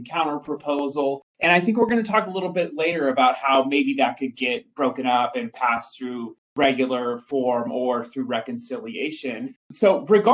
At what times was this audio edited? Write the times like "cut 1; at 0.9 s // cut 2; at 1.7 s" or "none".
none